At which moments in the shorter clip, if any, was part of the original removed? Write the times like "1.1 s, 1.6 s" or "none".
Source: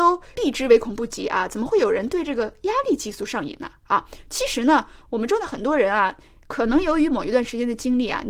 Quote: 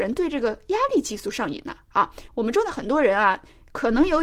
2.3 s